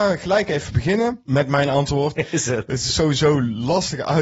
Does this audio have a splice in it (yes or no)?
yes